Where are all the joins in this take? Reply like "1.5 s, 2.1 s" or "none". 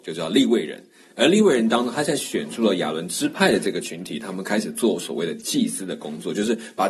none

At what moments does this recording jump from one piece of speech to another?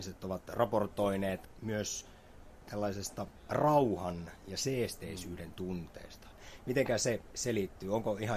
none

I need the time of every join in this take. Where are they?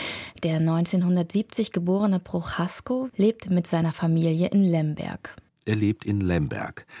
3.1 s, 5.5 s

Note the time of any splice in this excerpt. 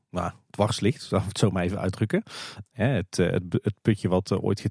2.7 s

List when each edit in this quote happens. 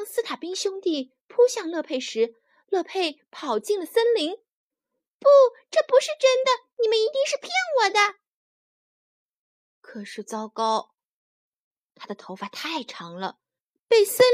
none

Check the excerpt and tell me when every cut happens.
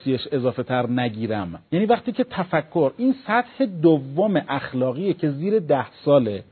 1.7 s

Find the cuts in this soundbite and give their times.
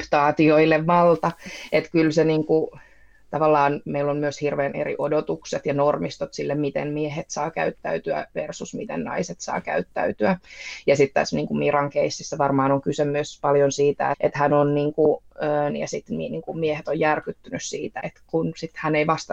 14.1 s, 15.7 s, 18.0 s

